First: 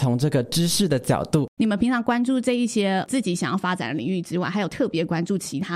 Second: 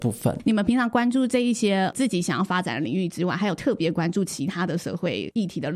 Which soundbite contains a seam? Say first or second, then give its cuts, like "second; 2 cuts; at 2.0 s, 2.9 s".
first; 1 cut; at 1.6 s